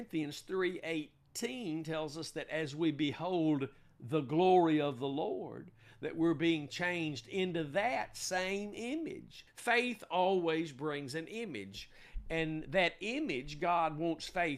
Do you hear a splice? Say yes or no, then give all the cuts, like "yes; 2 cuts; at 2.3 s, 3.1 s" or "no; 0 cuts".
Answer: yes; 1 cut; at 9.5 s